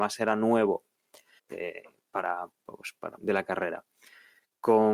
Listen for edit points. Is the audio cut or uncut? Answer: cut